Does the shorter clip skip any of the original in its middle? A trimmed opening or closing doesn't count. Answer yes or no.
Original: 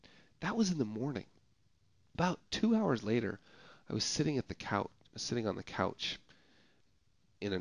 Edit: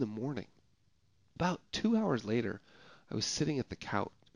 no